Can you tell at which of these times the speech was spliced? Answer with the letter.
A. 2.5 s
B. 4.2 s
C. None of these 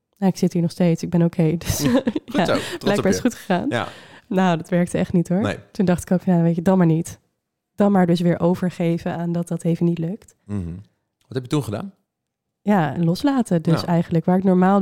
B